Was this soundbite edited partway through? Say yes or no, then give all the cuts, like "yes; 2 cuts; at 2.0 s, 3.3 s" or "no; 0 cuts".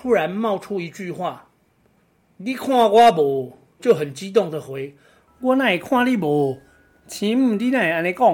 yes; 1 cut; at 3.8 s